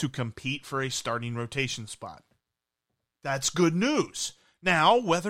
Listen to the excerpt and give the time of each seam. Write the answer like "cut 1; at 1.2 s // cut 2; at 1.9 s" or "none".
none